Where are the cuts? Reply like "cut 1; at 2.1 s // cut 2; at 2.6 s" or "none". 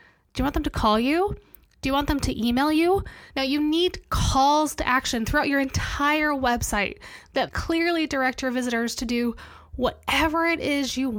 cut 1; at 3.3 s // cut 2; at 7.5 s